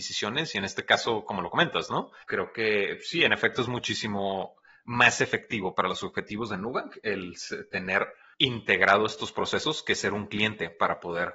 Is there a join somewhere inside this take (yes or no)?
yes